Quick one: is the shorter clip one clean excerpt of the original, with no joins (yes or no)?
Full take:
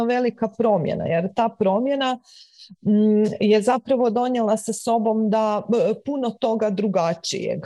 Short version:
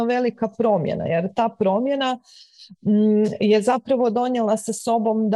yes